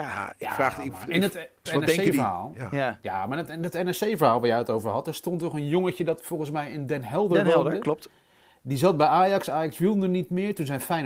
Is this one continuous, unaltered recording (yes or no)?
no